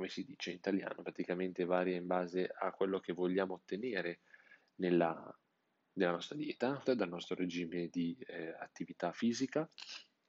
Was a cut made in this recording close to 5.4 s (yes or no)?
no